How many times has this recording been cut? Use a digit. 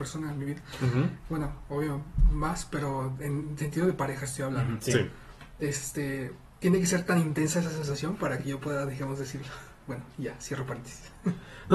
0